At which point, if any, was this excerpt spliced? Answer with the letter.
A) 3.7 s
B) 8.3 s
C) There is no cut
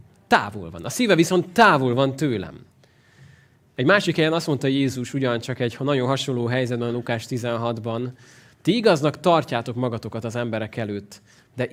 C